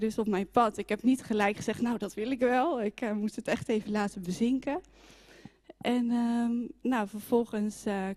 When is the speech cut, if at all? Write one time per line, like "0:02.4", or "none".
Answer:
none